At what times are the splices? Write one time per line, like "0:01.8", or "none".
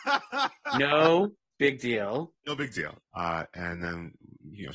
0:03.0

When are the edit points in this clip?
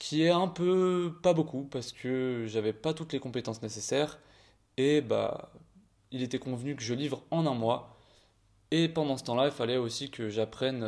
none

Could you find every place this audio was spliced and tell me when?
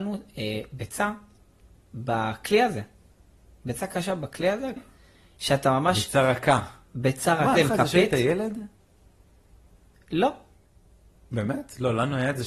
0:04.8
0:07.5

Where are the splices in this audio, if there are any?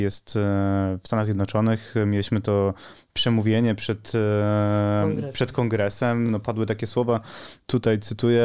none

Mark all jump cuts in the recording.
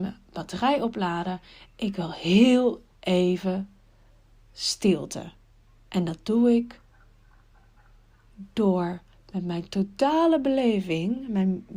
0:05.8

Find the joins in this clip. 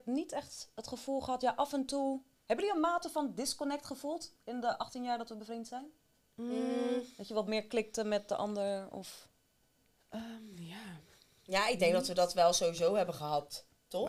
none

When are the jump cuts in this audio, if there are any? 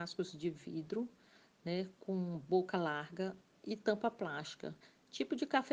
none

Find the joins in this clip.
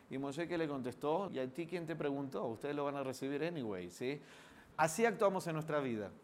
0:01.3
0:04.7

